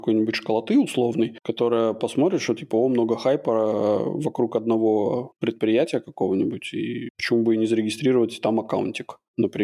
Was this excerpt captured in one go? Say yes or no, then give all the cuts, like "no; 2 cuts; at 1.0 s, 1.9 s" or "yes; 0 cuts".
yes; 0 cuts